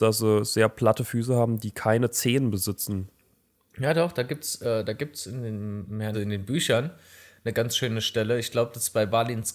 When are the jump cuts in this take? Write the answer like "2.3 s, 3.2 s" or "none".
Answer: 6.1 s